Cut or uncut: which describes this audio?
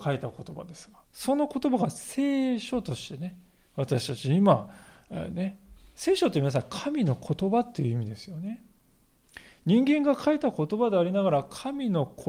cut